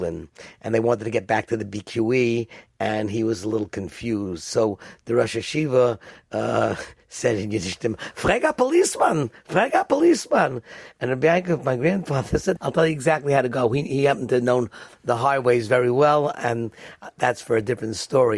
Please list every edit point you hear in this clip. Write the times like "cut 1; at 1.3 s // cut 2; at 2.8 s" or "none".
cut 1; at 12.6 s